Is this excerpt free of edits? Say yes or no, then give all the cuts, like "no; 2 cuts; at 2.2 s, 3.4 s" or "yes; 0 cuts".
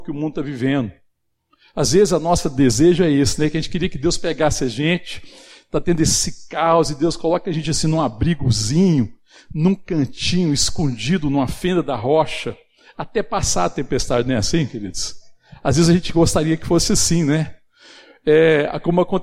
yes; 0 cuts